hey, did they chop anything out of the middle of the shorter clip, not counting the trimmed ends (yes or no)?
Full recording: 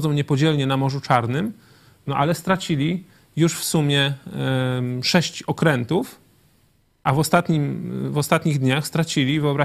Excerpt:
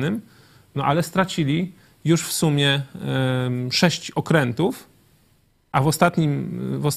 no